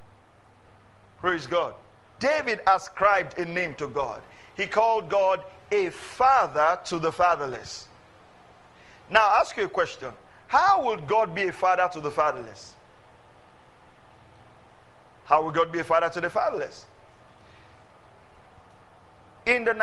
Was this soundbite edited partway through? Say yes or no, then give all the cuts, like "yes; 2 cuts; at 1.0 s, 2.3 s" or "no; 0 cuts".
yes; 1 cut; at 2.2 s